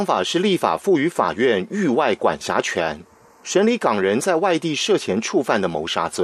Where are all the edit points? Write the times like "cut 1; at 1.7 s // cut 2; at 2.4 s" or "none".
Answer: none

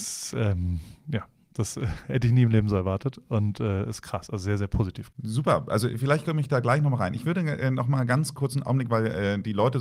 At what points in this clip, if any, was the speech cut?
cut 1; at 5.1 s

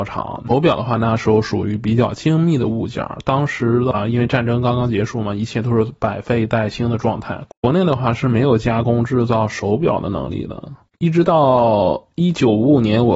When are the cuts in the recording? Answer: none

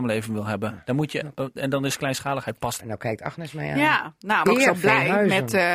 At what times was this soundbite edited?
cut 1; at 2.8 s // cut 2; at 4.5 s

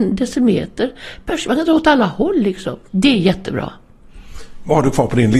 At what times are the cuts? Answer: cut 1; at 2.9 s

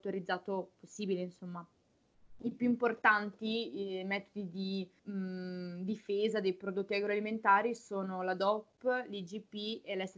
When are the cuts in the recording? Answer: cut 1; at 5.0 s

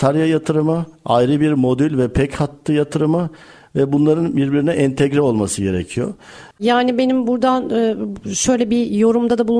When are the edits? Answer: cut 1; at 6.5 s

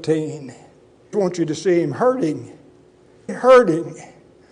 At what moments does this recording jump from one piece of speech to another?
cut 1; at 1.1 s // cut 2; at 3.3 s

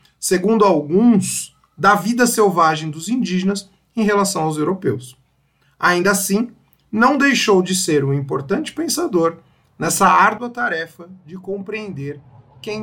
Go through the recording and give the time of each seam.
none

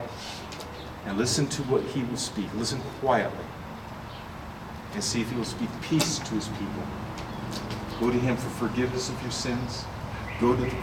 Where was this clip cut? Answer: none

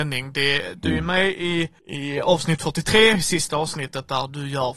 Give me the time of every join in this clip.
cut 1; at 1.8 s

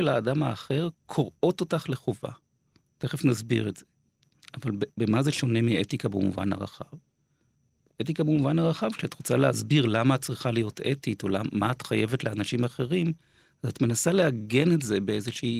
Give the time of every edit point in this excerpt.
none

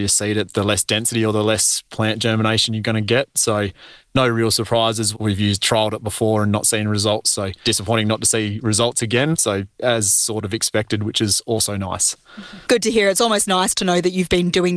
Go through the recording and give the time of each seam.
cut 1; at 5.1 s

